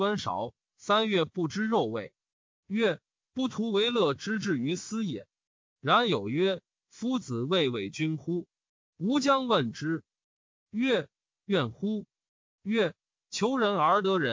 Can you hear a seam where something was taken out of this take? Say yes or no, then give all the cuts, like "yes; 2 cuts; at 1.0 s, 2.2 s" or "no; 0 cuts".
yes; 2 cuts; at 8.8 s, 10.4 s